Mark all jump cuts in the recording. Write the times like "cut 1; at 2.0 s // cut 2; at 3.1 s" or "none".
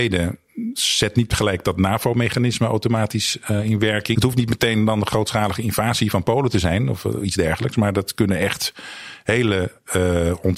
cut 1; at 4.1 s